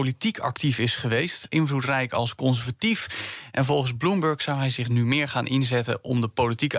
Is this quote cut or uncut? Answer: uncut